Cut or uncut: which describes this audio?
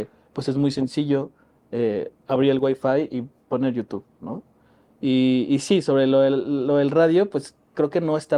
uncut